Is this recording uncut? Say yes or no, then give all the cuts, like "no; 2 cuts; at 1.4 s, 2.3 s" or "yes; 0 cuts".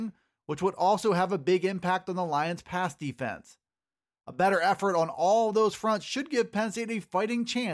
yes; 0 cuts